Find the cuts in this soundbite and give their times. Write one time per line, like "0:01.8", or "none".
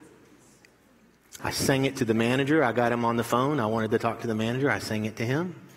0:01.4